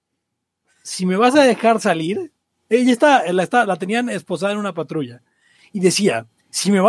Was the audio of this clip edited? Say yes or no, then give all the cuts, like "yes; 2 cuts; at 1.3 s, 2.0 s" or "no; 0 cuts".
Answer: no; 0 cuts